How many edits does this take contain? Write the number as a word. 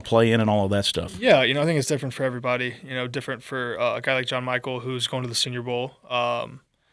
zero